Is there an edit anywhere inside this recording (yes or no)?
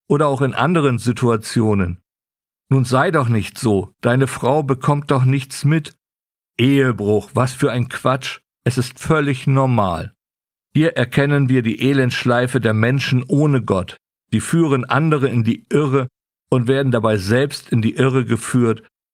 yes